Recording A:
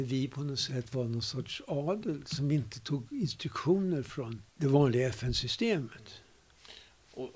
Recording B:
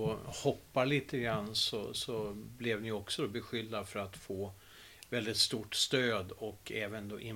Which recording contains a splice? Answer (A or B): A